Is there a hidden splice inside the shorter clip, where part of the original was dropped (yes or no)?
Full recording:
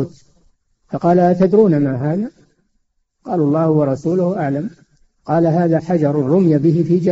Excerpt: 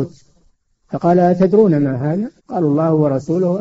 yes